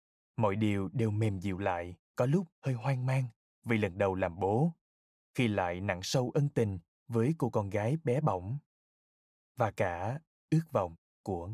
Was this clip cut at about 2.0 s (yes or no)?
yes